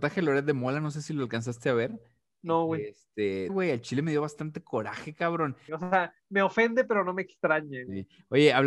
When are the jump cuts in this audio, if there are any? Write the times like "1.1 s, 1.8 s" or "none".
3.5 s, 5.7 s